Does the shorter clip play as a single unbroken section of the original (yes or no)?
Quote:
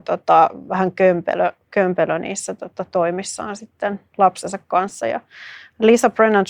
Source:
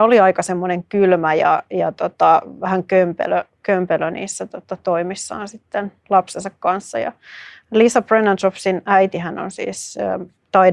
yes